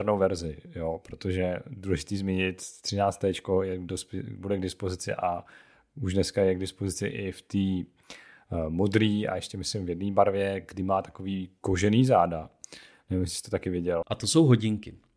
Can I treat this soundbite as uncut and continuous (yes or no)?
no